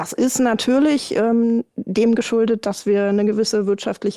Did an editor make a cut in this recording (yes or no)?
yes